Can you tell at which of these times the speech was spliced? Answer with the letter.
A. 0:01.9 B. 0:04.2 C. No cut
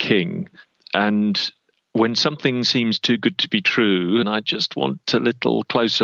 B